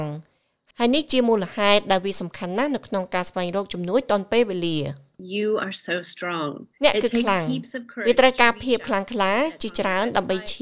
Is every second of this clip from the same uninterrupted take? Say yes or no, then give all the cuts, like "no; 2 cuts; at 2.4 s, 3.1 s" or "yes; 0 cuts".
no; 1 cut; at 6.7 s